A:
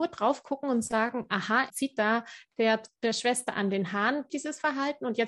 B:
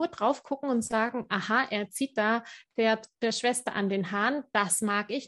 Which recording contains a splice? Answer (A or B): A